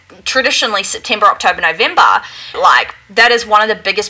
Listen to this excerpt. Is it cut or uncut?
cut